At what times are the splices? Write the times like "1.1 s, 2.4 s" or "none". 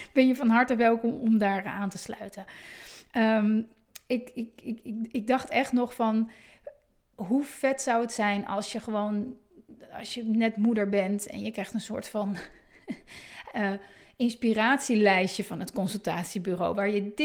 none